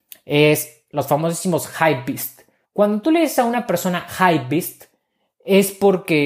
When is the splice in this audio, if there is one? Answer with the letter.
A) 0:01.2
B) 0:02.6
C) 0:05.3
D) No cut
B